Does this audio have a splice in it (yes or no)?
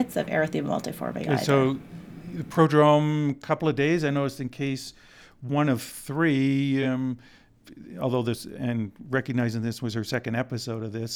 no